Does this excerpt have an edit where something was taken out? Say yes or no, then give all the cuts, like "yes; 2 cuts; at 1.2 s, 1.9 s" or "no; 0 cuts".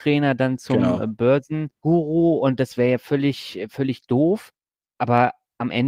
no; 0 cuts